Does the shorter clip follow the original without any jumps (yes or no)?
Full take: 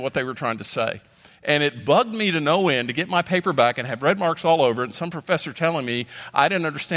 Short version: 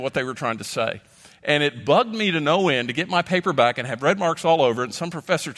yes